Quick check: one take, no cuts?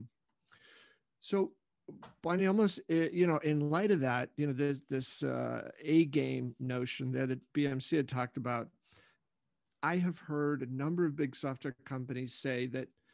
yes; 0 cuts

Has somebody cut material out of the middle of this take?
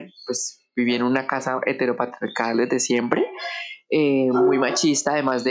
no; 0 cuts

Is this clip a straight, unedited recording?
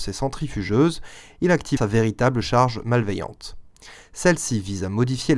no; 1 cut; at 1.8 s

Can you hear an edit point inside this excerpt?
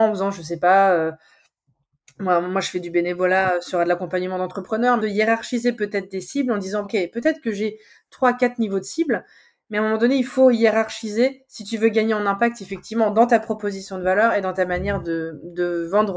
yes; 2 cuts; at 5.0 s, 6.8 s

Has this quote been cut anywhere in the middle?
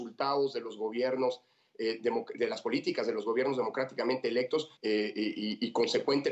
yes; 1 cut; at 4.8 s

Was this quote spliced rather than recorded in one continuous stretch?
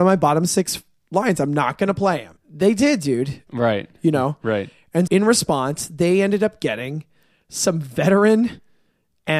yes; 3 cuts; at 2.4 s, 3.5 s, 5.1 s

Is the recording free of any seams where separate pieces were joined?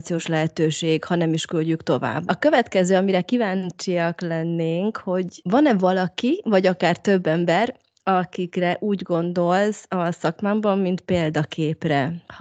no; 1 cut; at 2.3 s

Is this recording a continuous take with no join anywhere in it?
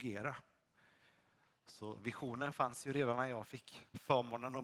yes; 0 cuts

